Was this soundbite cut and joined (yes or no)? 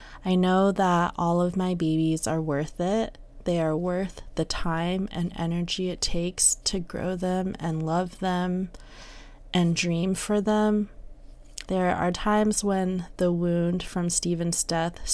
yes